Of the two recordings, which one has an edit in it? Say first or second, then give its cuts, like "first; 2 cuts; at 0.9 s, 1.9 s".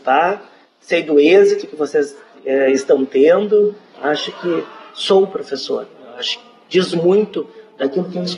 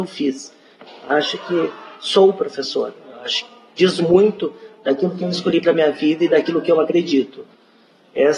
first; 1 cut; at 3.9 s